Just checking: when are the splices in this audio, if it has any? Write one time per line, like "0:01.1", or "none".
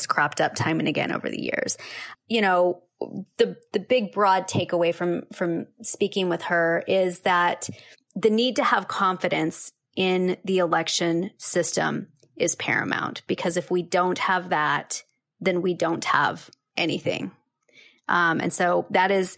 0:02.1